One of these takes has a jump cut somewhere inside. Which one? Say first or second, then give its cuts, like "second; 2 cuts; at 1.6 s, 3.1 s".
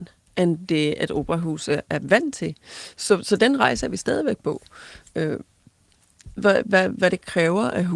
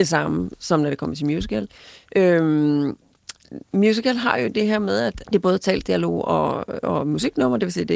second; 2 cuts; at 3.6 s, 5.2 s